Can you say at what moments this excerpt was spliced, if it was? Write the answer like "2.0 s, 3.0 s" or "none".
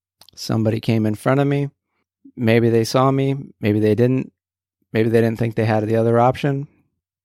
none